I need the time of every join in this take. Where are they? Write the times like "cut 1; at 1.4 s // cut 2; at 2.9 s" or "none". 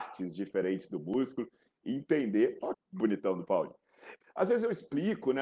cut 1; at 2.7 s // cut 2; at 4.2 s